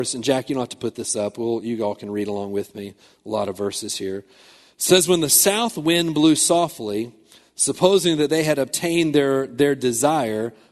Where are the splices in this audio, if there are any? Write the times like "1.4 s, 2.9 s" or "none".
none